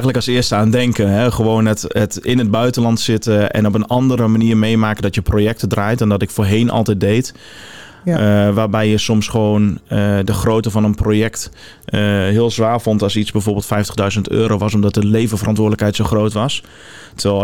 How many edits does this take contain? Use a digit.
0